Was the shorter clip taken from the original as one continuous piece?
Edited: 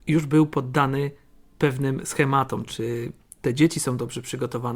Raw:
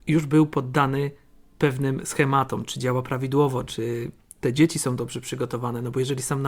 no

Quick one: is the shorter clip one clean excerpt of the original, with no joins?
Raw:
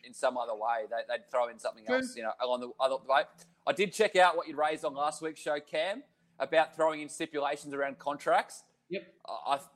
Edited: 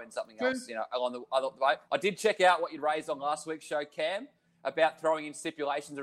no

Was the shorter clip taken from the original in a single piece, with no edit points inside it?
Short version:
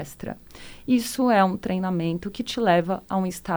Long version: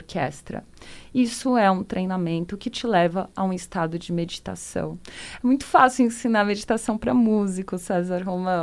yes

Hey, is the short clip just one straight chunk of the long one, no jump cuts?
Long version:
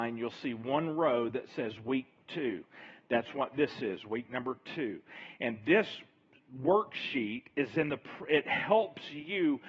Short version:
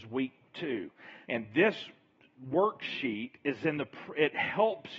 no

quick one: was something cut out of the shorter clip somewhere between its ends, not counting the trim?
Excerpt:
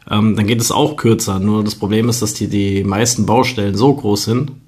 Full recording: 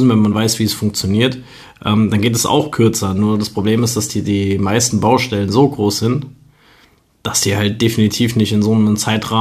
no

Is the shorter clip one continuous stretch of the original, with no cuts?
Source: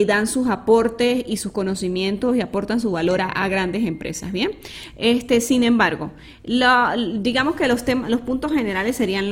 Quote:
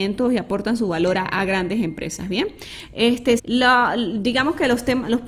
no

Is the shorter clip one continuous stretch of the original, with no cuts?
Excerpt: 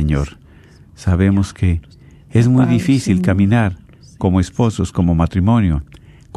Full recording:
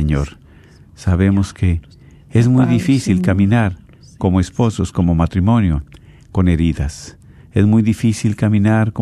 yes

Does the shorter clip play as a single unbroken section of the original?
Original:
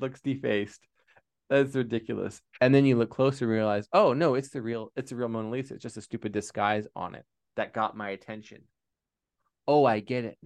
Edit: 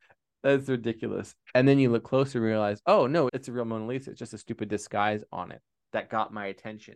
no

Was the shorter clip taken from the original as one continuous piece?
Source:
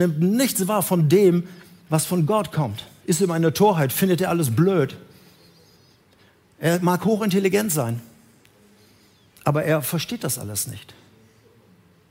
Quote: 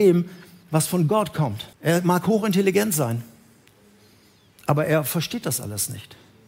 no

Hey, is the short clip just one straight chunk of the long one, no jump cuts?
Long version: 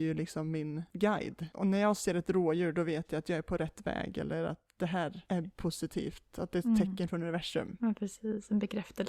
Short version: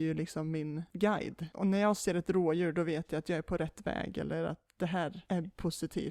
yes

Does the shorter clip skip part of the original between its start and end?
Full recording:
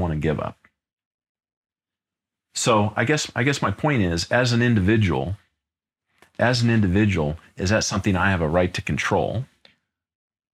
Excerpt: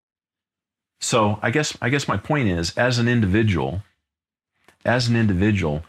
no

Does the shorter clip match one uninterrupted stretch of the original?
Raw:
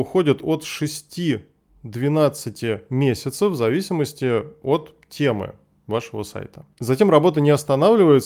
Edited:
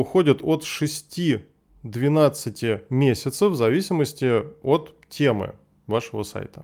yes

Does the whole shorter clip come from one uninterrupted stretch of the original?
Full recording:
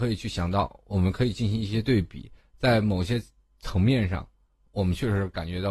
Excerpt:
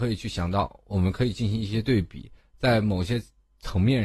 yes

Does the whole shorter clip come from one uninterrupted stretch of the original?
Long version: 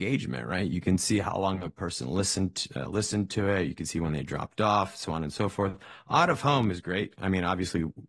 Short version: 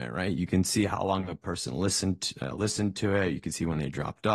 yes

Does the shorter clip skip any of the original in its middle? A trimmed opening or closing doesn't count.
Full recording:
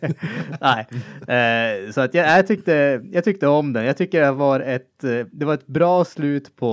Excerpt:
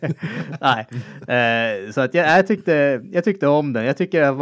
no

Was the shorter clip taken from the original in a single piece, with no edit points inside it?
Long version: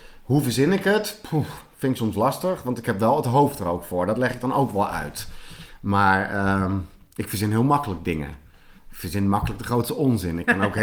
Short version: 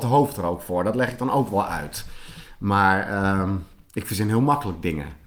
yes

